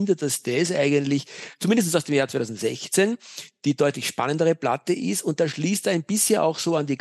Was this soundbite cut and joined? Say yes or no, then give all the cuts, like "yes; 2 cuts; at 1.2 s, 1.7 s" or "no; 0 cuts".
no; 0 cuts